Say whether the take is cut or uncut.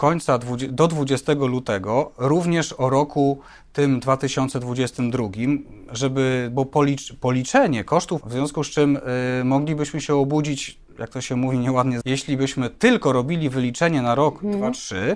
cut